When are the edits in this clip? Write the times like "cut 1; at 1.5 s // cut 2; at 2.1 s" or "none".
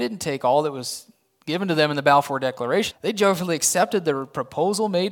cut 1; at 2.9 s